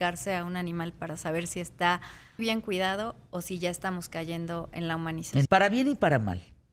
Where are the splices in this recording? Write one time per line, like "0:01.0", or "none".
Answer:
0:02.4
0:05.4